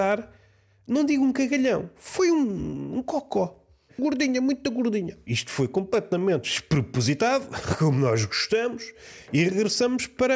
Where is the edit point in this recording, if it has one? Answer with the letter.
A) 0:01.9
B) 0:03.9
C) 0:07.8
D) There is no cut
B